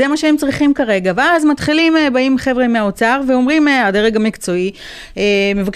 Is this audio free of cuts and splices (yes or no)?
yes